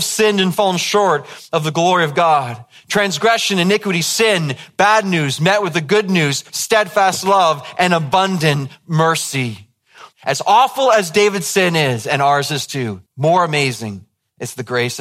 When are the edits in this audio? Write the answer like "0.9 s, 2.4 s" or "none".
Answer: 6.5 s, 10.1 s, 13.1 s